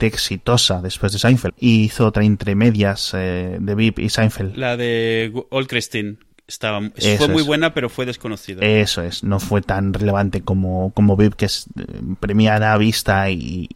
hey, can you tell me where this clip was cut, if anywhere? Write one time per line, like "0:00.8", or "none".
0:01.5